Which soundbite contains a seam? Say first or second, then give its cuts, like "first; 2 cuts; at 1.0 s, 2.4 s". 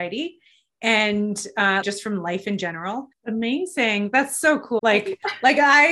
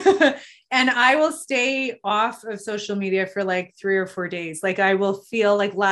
first; 3 cuts; at 1.8 s, 3.1 s, 4.8 s